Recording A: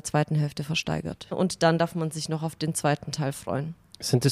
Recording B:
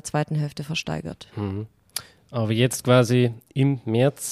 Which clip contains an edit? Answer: A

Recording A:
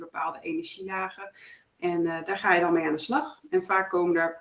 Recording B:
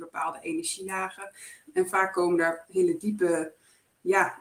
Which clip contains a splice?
B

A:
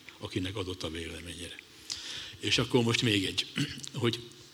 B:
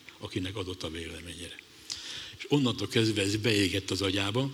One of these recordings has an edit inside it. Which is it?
B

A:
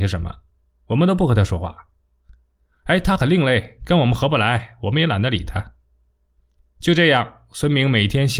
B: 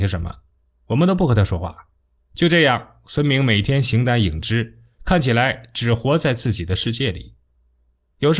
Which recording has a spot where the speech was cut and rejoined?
B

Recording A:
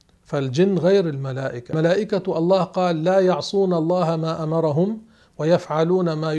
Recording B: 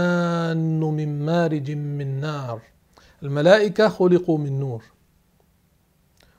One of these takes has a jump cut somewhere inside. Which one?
A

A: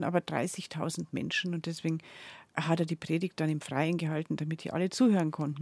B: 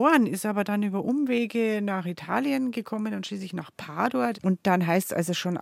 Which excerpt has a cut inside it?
B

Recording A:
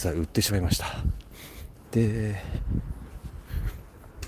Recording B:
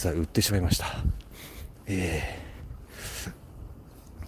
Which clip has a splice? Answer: A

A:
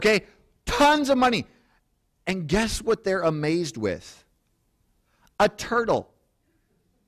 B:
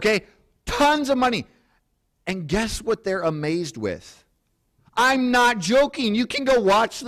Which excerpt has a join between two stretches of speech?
B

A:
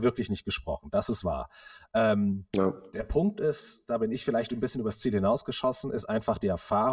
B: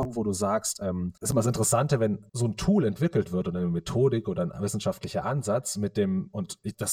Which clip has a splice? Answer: B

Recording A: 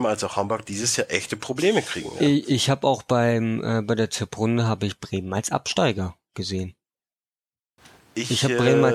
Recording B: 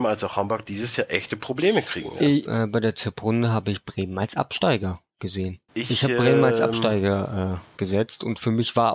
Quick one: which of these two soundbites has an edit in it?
B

